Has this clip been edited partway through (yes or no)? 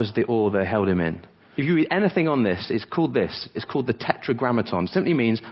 yes